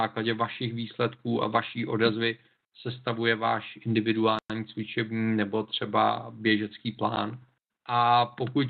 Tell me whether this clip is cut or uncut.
cut